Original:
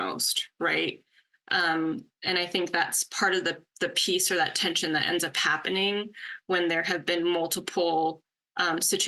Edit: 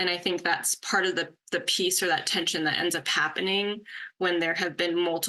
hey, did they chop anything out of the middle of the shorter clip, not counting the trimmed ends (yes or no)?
no